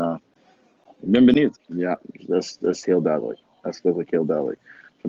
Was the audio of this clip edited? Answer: yes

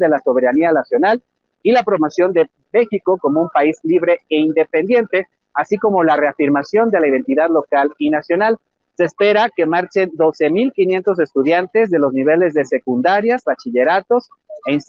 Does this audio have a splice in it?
yes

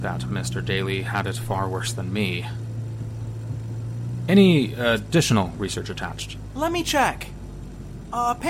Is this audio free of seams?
yes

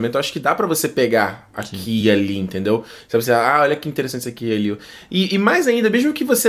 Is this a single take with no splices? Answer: yes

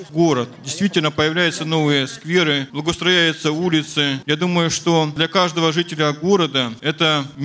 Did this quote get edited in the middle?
no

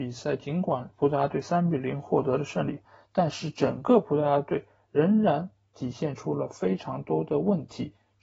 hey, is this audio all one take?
yes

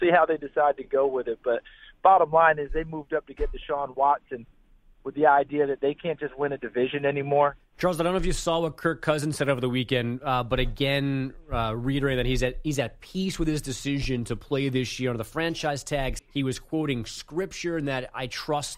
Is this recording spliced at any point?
yes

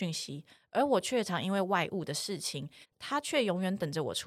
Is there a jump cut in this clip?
yes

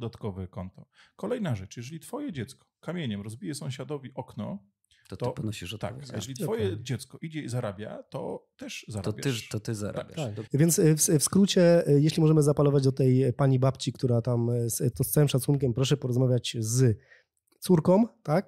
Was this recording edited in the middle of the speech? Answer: yes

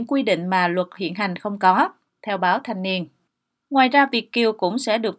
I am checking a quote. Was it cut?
no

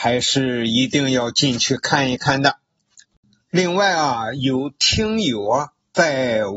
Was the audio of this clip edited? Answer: no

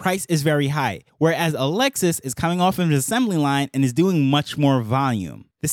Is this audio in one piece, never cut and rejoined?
yes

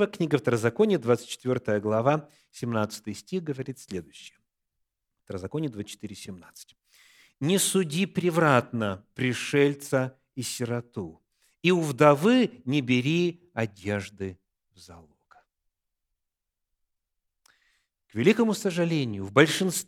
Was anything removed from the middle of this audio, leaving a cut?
no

